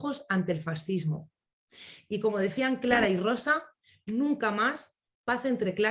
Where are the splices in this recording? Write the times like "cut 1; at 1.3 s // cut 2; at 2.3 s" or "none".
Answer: cut 1; at 2.0 s